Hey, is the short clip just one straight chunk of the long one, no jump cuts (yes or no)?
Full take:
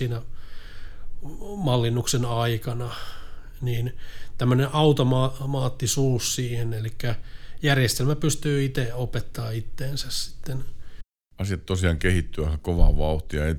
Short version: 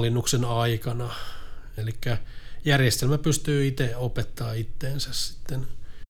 no